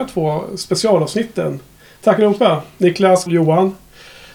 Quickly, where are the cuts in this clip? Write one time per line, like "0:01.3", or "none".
0:03.3